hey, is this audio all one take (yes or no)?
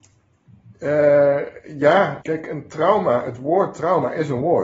no